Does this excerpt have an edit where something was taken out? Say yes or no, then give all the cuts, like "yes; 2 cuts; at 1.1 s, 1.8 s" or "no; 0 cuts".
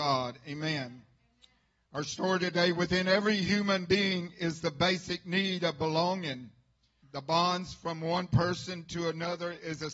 yes; 1 cut; at 7.0 s